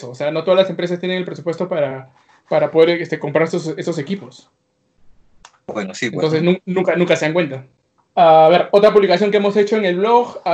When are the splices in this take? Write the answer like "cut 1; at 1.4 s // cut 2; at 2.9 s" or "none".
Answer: none